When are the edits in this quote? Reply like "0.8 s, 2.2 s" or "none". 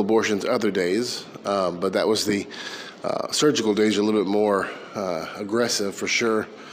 none